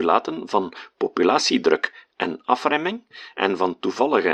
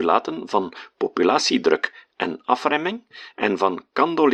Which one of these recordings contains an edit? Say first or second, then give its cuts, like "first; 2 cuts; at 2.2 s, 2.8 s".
first; 1 cut; at 3.3 s